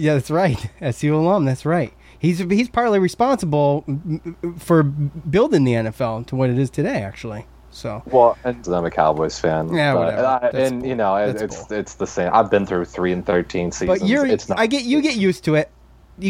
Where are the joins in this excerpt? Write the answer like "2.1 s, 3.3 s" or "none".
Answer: 8.6 s